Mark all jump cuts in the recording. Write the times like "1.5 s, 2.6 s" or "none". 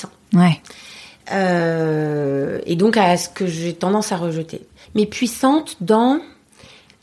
4.8 s